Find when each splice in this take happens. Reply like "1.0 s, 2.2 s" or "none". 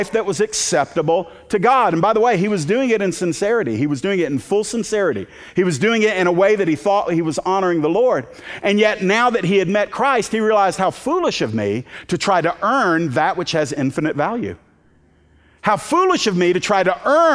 none

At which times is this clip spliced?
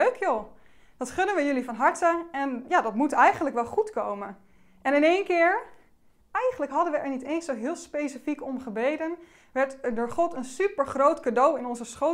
none

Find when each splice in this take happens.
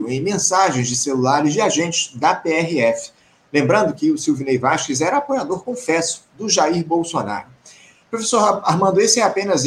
none

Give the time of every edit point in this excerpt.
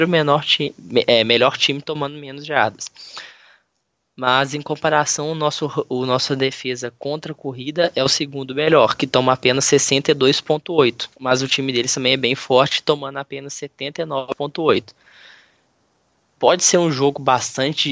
11.1 s

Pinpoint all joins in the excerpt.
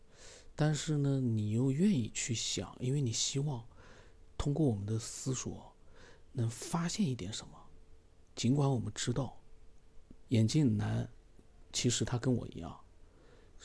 10.2 s

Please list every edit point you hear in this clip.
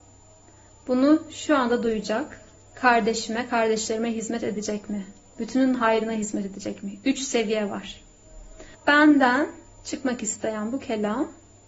5.4 s, 8.7 s

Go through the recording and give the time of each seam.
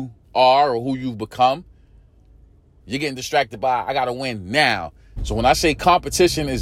2.8 s, 5.2 s

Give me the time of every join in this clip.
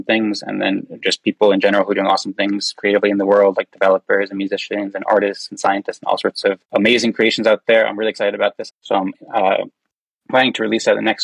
6.6 s, 8.7 s

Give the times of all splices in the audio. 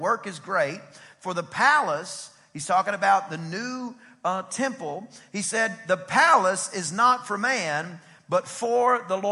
none

